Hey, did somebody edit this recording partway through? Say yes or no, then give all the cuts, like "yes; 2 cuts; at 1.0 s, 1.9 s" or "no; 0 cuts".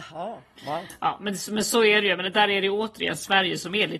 no; 0 cuts